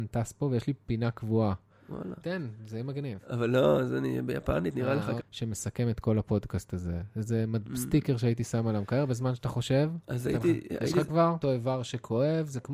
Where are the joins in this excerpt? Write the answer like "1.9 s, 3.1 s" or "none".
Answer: 2.2 s, 5.2 s, 11.4 s